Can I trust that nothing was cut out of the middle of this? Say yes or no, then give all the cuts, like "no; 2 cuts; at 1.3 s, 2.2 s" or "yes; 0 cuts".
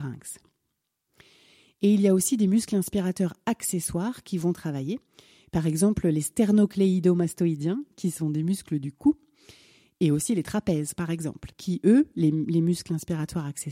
yes; 0 cuts